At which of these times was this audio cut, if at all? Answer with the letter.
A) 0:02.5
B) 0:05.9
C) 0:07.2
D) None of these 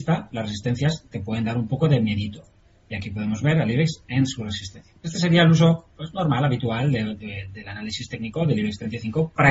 C